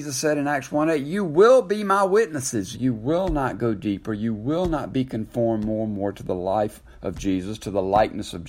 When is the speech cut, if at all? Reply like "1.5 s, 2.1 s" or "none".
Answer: 2.7 s

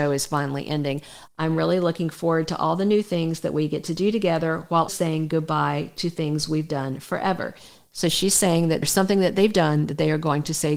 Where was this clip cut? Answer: 1.3 s, 4.9 s

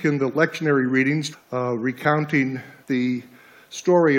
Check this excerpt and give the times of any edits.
1.3 s, 2.8 s

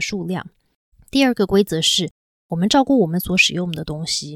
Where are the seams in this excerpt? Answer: 0.9 s

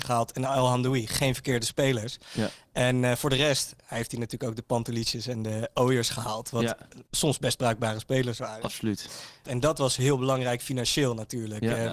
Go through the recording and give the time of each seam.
7.1 s, 9.4 s

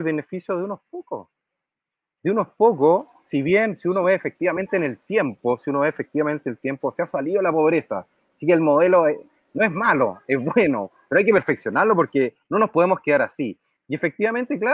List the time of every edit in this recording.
none

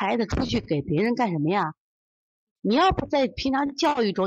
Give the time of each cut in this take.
2.5 s

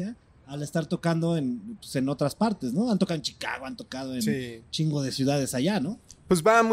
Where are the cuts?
none

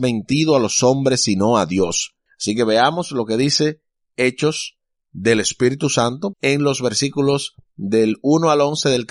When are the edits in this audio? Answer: 2.3 s, 6.3 s

